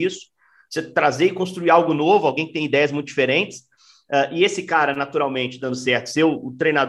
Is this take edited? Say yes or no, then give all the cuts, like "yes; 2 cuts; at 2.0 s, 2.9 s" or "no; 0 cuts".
no; 0 cuts